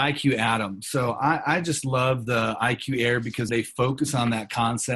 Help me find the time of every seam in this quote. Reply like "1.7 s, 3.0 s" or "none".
3.5 s